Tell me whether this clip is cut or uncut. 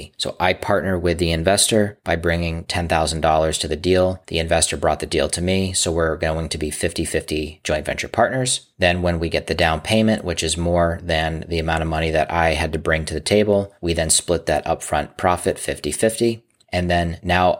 uncut